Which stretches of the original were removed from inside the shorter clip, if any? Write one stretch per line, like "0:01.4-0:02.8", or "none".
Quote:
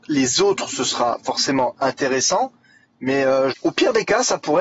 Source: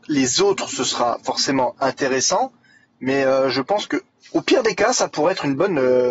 0:03.5-0:04.2